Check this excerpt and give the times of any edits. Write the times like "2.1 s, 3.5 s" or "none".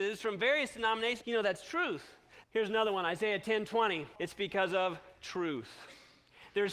1.2 s, 2.4 s, 4.2 s